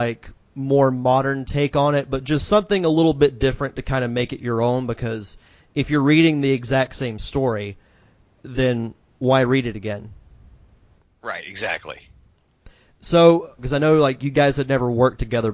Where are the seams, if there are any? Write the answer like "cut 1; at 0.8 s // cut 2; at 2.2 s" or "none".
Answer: cut 1; at 13.6 s

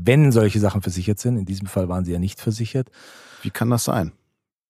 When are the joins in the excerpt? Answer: none

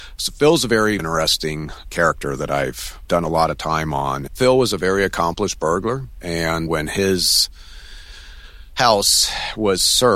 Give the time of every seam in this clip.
cut 1; at 1.0 s // cut 2; at 4.3 s

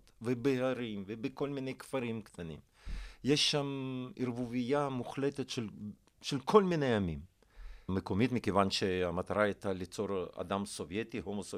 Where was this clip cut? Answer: cut 1; at 7.9 s

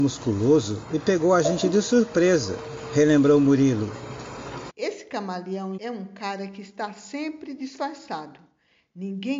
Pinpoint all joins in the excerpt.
cut 1; at 4.7 s // cut 2; at 5.8 s

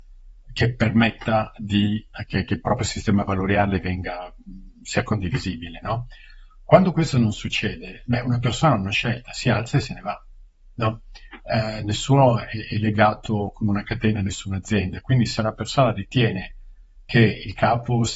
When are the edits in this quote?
none

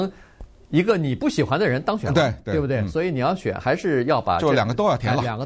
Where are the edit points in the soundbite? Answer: none

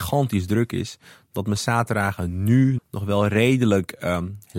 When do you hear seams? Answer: cut 1; at 2.8 s

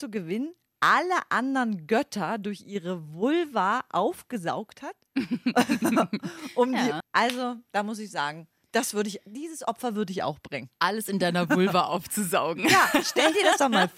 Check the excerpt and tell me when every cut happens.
cut 1; at 7.0 s

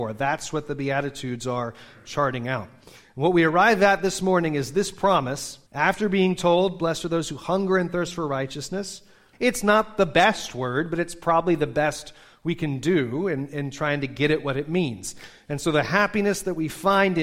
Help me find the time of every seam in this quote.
cut 1; at 5.7 s // cut 2; at 9.3 s

